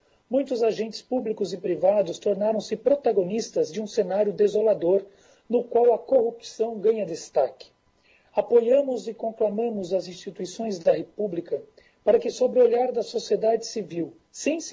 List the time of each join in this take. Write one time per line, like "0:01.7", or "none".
none

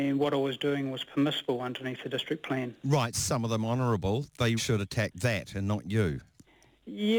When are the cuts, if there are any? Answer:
0:03.1
0:04.6

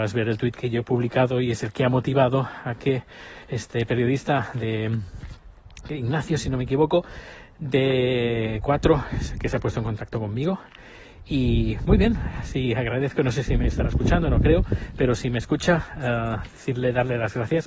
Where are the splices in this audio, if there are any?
none

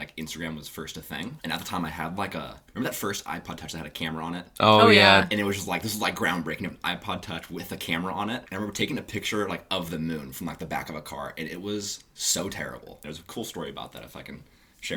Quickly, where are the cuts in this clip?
0:02.7
0:08.5
0:13.0

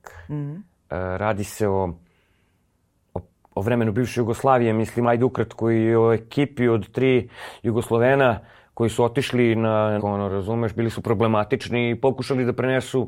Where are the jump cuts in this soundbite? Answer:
0:10.0

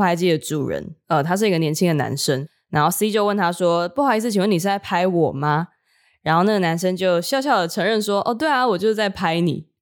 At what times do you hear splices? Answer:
none

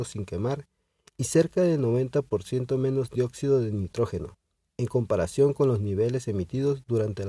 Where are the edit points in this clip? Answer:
none

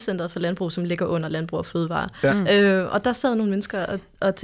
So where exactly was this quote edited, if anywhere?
none

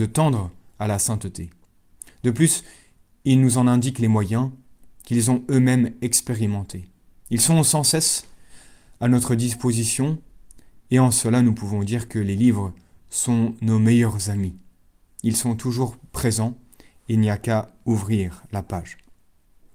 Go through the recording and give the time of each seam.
none

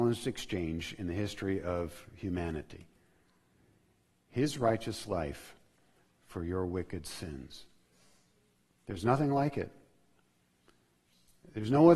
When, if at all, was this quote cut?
none

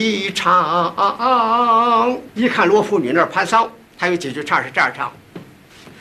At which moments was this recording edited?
0:02.3

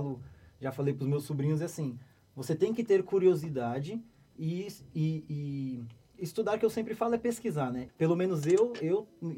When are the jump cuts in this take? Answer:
0:07.9

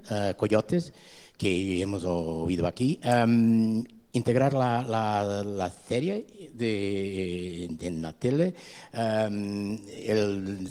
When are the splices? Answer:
none

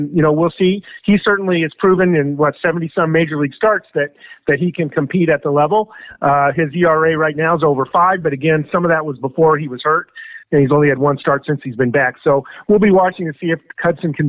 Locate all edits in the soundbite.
none

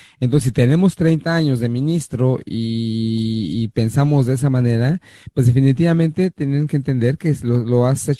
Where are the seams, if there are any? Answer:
none

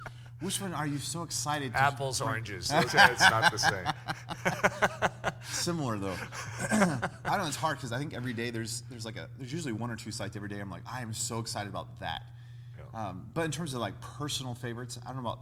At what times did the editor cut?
0:02.9

